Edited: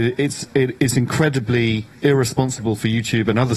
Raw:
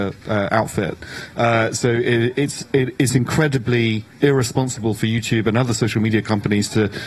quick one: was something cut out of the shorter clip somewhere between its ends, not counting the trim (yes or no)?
no